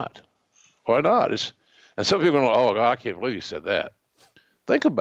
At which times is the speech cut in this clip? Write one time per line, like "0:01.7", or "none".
none

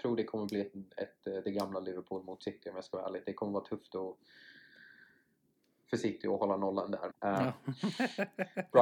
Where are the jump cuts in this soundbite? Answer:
0:07.1

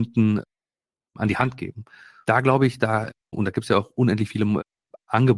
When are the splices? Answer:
0:03.3

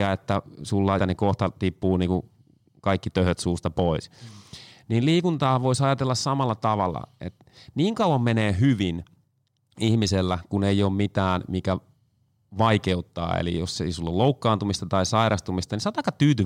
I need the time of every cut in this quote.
0:01.0

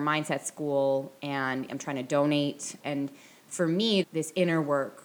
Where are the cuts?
0:02.8
0:04.0

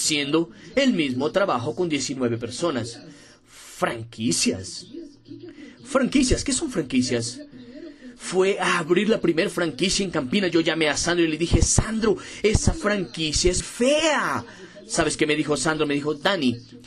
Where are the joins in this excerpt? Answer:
0:13.6

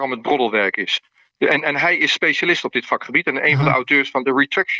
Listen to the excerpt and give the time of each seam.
none

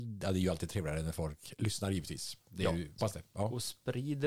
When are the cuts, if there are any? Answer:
0:03.0

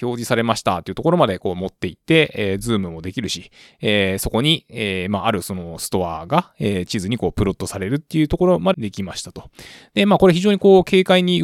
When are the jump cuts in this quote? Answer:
0:08.7

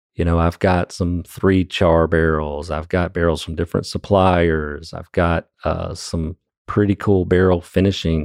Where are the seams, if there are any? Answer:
none

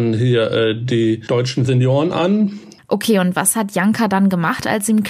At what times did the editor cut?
0:02.8

